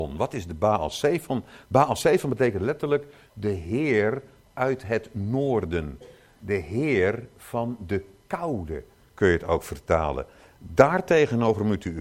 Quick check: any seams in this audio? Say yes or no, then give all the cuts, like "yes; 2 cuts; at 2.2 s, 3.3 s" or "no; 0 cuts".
no; 0 cuts